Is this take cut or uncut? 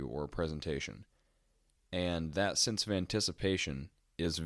uncut